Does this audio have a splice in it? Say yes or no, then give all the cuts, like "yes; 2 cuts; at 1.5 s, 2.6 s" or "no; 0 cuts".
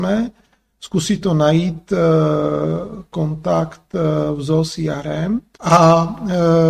yes; 1 cut; at 5.5 s